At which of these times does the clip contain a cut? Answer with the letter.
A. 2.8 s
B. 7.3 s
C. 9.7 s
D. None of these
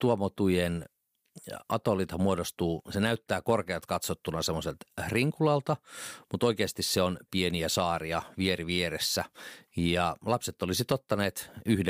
B